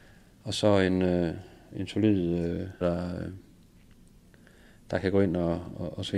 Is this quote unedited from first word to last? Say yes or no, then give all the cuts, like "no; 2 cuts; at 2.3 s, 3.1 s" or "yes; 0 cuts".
no; 1 cut; at 2.8 s